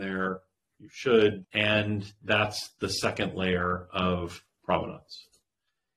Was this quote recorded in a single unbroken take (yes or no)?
no